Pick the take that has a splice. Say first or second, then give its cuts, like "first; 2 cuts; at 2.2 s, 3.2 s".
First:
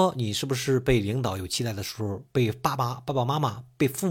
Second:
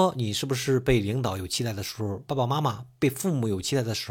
second; 1 cut; at 2.3 s